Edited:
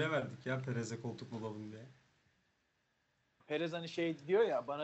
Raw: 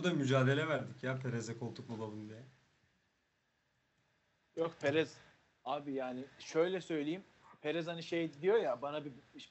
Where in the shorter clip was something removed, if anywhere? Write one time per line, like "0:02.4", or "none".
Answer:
0:03.4